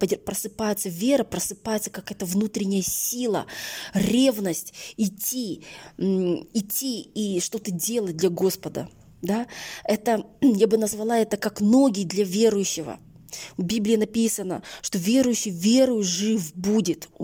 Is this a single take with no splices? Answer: yes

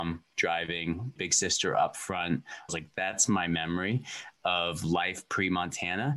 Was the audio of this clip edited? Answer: yes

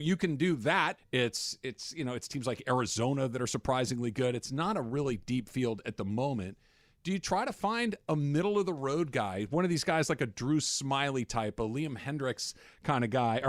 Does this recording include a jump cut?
yes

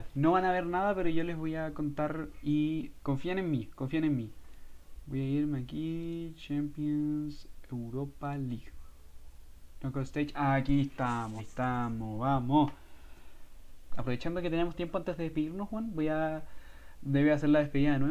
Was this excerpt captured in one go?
no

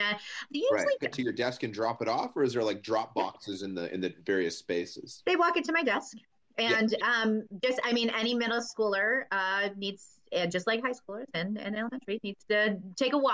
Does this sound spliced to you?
yes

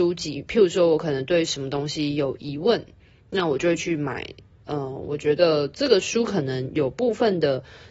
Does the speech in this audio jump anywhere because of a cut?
no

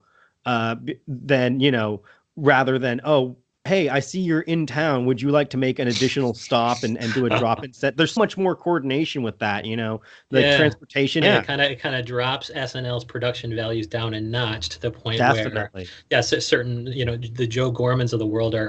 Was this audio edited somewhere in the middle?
yes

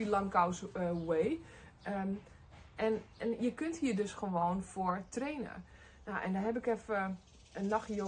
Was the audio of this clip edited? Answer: no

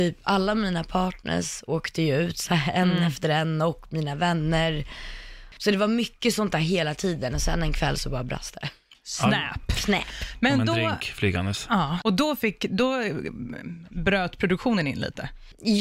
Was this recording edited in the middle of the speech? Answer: yes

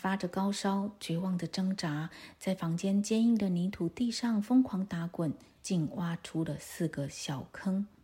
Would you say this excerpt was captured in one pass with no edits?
no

